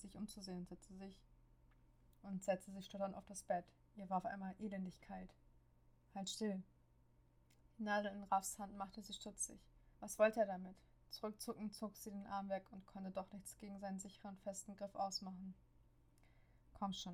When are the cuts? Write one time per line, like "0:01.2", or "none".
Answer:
0:09.9